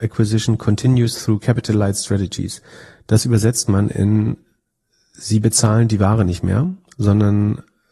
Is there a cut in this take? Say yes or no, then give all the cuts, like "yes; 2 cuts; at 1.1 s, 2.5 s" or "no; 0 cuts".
no; 0 cuts